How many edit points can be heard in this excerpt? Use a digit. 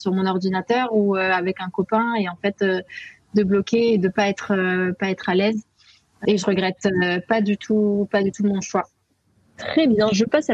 0